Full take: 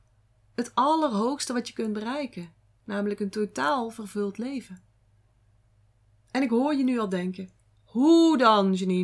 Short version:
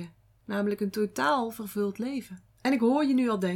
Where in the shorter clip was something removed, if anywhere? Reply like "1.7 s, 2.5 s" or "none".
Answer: 2.5 s